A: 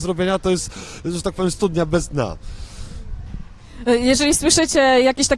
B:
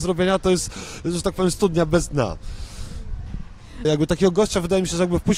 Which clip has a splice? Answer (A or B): B